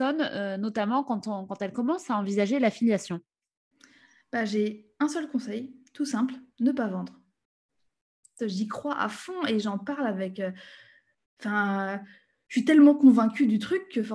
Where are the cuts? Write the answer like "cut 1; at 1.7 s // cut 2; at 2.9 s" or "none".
cut 1; at 8.4 s